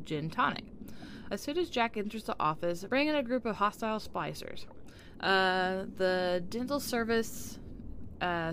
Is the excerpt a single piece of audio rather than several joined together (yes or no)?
no